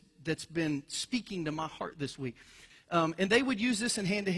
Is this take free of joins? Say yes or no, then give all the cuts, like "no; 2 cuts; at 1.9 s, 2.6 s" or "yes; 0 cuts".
no; 1 cut; at 2.7 s